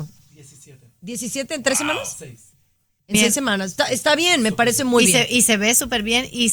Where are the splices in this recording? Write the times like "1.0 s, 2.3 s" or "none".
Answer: none